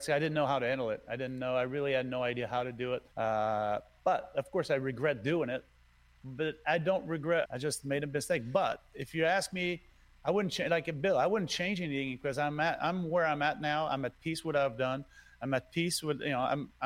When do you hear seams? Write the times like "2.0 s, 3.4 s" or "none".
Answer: 3.1 s, 7.4 s